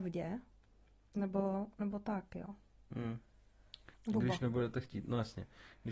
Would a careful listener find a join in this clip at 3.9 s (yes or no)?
yes